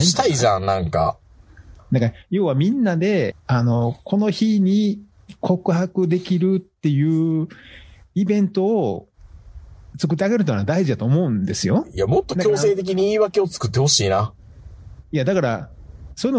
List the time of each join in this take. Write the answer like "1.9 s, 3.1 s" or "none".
3.3 s